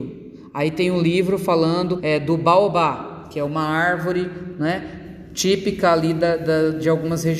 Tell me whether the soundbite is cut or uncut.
cut